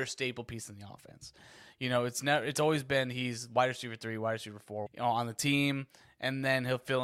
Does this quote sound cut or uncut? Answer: cut